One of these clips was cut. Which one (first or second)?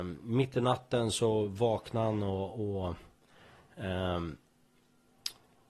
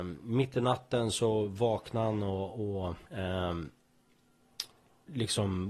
second